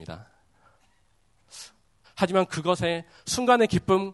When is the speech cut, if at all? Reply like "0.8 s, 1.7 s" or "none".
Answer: 2.0 s